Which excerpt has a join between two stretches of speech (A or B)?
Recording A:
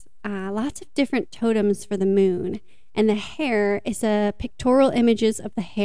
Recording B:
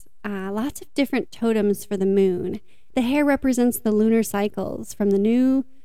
B